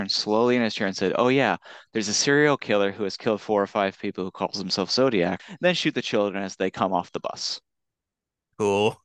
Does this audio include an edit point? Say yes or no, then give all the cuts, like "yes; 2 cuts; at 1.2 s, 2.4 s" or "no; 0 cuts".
yes; 1 cut; at 5.4 s